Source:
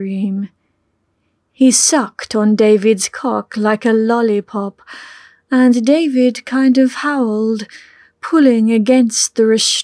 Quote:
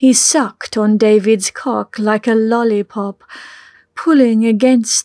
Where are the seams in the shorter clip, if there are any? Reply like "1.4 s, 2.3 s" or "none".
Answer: 3.7 s